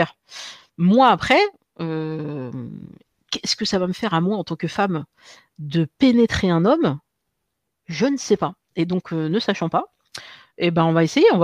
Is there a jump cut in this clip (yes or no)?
no